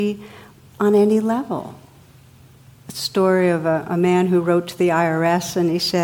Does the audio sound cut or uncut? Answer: uncut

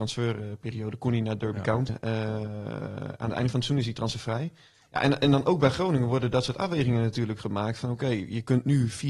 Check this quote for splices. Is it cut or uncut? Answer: cut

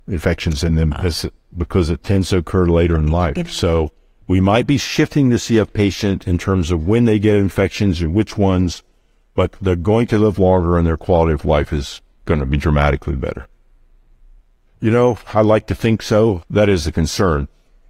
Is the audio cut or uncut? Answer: cut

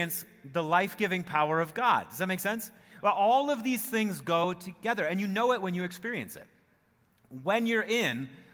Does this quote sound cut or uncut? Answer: uncut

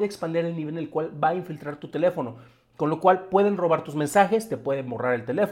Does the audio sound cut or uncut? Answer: uncut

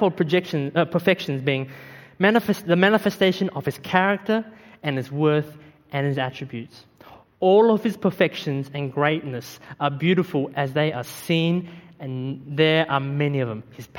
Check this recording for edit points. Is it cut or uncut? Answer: uncut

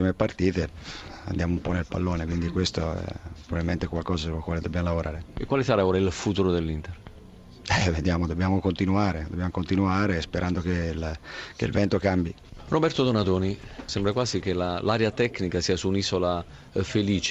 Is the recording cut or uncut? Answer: cut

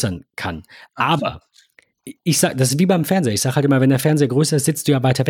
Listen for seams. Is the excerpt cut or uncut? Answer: uncut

